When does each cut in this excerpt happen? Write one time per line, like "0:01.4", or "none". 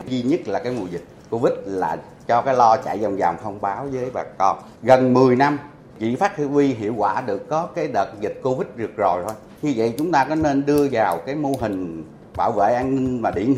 0:04.8

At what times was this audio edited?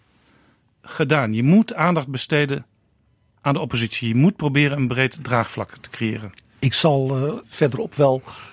0:07.4

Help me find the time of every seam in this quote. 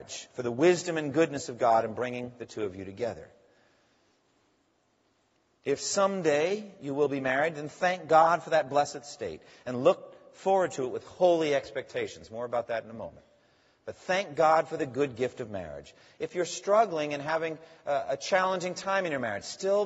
none

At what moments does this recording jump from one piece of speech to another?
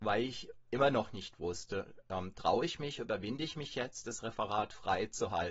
none

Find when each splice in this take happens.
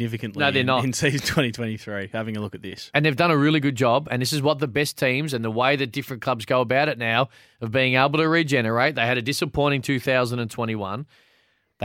none

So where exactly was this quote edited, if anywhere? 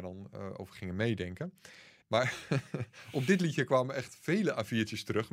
0:02.0

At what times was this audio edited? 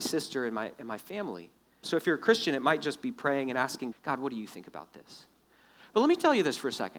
0:01.8
0:03.9

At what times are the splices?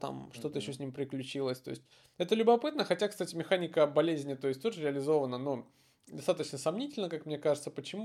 none

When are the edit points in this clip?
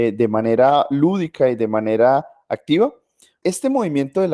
0:03.4

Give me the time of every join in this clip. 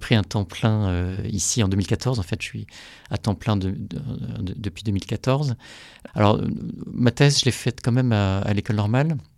0:06.1

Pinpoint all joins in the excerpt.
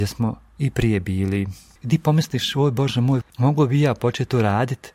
0:01.8
0:03.2

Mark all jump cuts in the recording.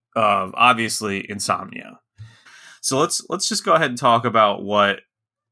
0:02.5

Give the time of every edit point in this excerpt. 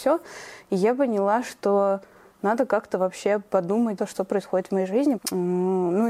0:04.0
0:05.2

